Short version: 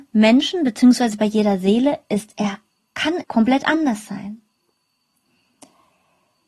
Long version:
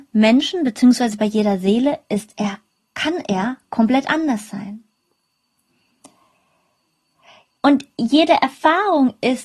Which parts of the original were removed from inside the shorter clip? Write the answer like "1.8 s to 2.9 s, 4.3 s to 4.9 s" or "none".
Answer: 3.2 s to 3.6 s